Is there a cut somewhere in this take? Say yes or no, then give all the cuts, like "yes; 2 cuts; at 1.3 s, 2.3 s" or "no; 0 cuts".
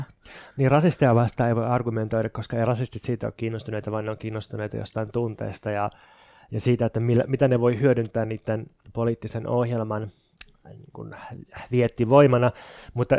no; 0 cuts